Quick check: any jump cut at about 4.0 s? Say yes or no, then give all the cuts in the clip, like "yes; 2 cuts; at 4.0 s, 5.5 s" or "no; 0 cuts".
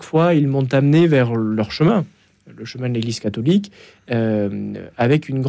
no; 0 cuts